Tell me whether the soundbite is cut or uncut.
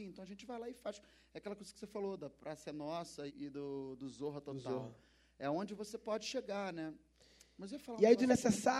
cut